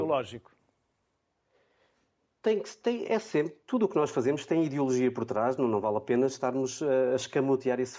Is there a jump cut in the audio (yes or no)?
no